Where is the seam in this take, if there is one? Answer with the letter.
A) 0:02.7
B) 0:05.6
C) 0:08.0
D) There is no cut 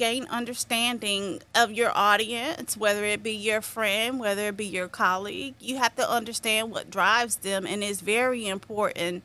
D